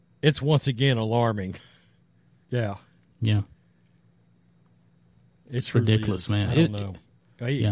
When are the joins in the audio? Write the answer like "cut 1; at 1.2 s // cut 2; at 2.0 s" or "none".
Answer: cut 1; at 2.4 s